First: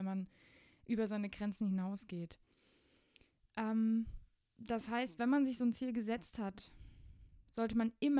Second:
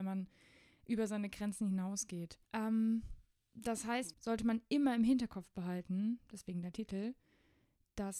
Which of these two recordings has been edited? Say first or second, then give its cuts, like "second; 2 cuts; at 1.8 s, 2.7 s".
second; 2 cuts; at 2.5 s, 4.1 s